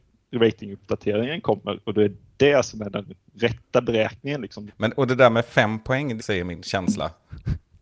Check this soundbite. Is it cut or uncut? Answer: cut